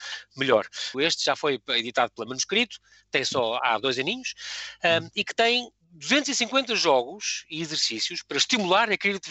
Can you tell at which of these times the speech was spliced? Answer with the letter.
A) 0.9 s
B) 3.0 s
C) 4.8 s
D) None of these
A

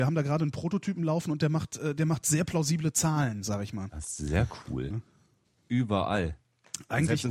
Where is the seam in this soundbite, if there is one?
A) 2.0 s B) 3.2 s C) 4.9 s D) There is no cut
C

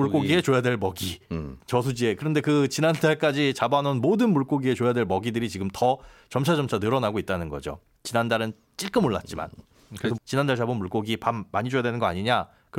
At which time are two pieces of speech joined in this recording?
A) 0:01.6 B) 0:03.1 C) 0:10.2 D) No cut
C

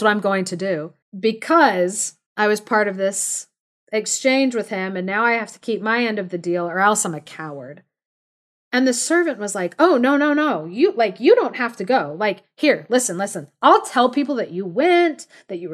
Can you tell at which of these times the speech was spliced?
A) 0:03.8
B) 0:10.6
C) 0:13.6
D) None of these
D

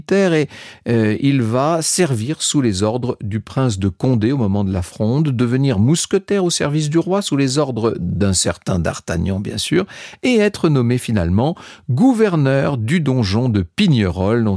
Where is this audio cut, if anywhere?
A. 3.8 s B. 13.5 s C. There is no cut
C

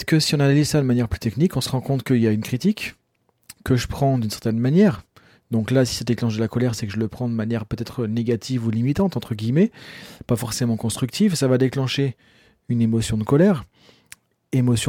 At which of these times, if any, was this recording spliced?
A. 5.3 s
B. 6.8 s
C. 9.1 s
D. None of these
D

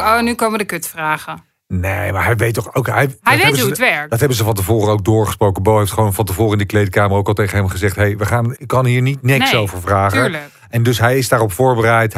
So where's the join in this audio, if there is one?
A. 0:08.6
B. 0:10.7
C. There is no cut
A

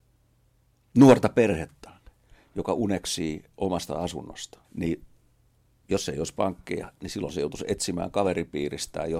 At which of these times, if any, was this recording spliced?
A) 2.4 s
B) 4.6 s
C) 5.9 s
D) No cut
B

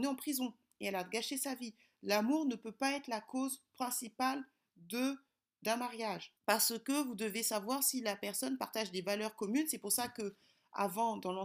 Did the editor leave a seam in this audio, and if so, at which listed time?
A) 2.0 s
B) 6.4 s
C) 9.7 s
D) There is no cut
B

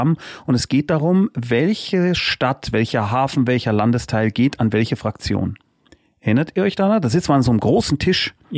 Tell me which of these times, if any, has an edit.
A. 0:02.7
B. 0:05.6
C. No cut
C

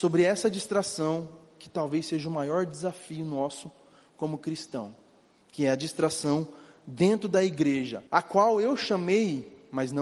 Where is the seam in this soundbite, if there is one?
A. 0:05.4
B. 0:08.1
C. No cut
B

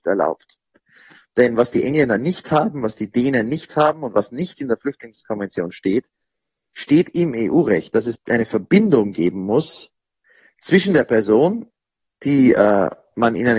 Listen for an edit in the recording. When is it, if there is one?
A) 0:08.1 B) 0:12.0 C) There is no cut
A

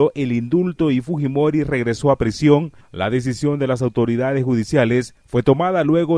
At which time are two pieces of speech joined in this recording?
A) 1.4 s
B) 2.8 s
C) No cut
C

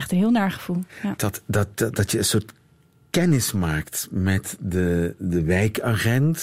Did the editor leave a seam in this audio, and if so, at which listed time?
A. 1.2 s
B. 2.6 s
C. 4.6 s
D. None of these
A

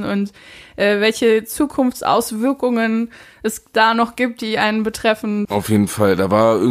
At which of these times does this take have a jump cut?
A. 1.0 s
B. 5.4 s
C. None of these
B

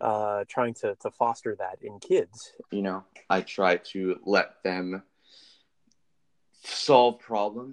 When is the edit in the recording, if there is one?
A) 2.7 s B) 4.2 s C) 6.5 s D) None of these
A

